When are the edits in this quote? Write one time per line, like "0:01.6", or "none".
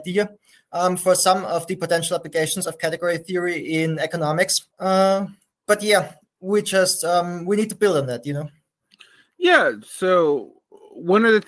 0:04.7